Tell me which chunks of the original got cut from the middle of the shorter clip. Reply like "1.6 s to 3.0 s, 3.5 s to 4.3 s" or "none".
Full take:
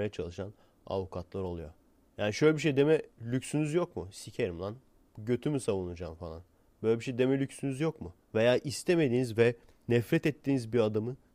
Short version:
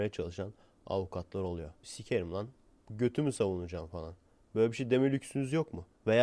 1.8 s to 4.1 s